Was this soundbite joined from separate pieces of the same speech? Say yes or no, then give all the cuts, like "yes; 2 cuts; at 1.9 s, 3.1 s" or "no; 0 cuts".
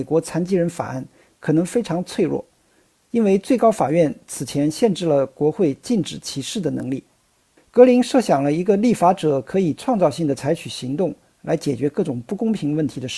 yes; 1 cut; at 7.6 s